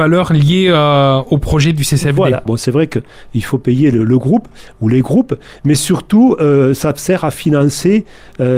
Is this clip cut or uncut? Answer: cut